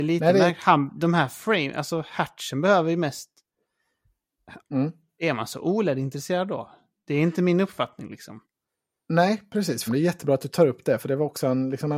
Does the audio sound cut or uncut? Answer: cut